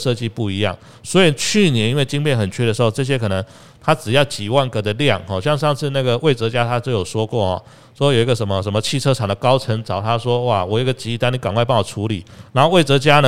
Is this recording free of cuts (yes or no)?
yes